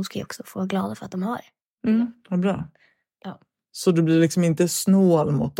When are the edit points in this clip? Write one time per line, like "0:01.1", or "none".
none